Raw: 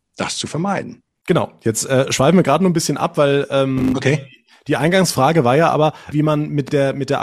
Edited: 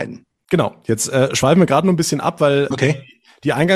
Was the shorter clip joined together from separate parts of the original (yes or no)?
yes